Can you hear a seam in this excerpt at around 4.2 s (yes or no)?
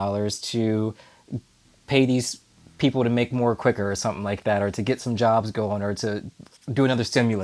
no